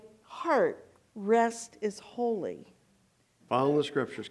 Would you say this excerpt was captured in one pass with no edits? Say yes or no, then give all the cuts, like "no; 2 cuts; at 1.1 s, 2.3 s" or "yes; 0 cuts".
no; 1 cut; at 3.4 s